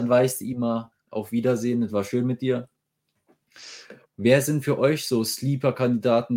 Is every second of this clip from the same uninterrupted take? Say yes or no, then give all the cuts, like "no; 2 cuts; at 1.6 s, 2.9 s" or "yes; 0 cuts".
no; 1 cut; at 4.0 s